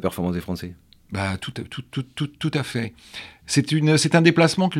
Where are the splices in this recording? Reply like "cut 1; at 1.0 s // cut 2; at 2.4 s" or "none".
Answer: none